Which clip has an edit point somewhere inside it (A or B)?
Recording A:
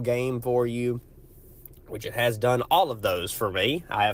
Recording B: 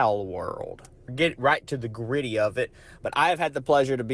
B